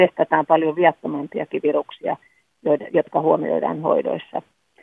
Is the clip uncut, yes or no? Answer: yes